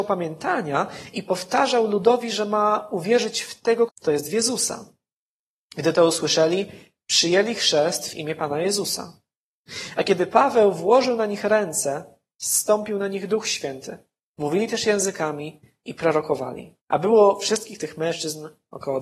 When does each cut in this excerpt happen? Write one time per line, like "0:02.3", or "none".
0:03.9
0:16.8